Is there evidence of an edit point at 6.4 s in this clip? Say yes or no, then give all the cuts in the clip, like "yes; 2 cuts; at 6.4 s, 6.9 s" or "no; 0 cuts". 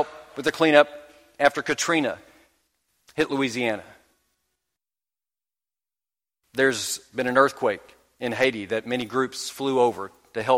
no; 0 cuts